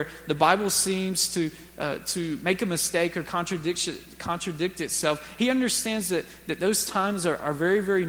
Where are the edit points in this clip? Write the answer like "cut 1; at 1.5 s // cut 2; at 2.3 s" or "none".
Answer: none